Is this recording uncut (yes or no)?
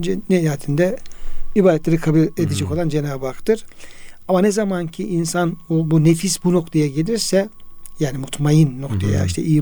yes